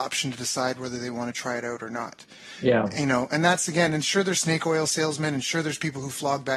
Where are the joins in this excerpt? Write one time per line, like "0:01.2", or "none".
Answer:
none